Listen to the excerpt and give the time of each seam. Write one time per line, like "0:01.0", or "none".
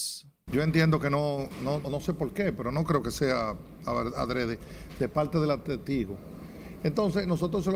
0:01.8